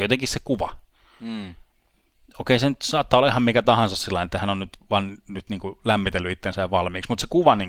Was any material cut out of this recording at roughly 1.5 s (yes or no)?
no